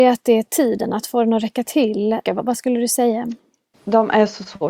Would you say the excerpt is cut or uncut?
cut